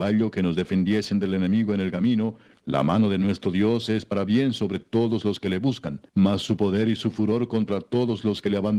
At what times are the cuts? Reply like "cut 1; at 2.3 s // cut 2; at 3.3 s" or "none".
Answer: cut 1; at 2.5 s // cut 2; at 6.1 s